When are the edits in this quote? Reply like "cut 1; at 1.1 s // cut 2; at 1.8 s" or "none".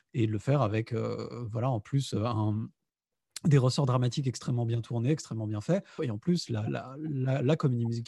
cut 1; at 6.0 s